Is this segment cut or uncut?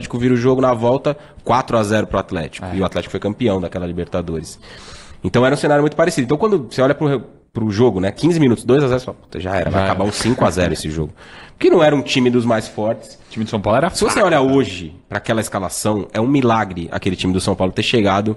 uncut